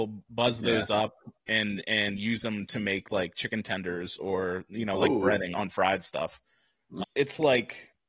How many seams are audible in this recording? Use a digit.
2